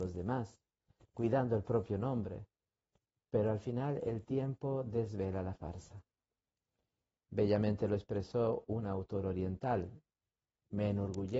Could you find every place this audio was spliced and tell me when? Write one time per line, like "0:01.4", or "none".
none